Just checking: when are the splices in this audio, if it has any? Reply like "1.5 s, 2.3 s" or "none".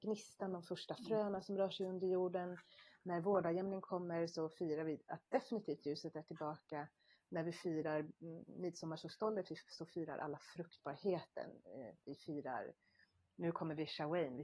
none